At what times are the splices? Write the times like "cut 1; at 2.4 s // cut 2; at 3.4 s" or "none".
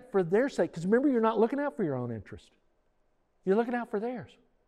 none

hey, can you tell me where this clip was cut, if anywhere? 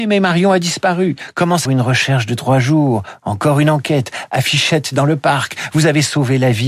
cut 1; at 1.7 s

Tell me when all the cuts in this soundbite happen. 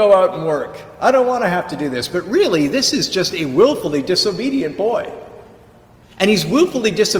none

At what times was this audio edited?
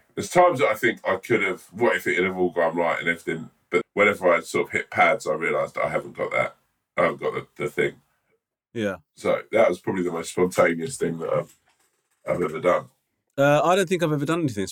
cut 1; at 3.8 s

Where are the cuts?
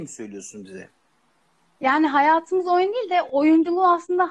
none

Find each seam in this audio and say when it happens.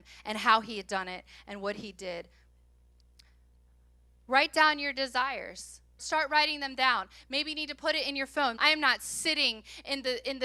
cut 1; at 6.0 s // cut 2; at 8.6 s

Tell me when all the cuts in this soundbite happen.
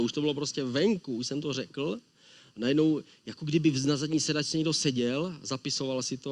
none

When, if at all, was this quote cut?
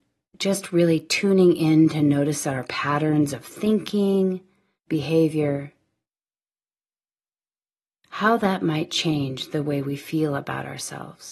cut 1; at 4.9 s

